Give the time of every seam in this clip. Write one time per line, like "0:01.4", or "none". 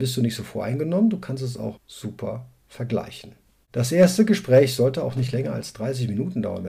0:01.8